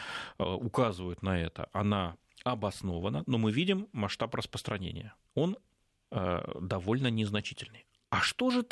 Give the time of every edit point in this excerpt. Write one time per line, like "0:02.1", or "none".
0:06.1